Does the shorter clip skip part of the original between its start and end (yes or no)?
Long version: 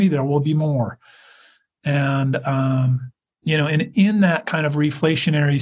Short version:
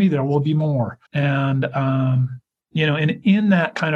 yes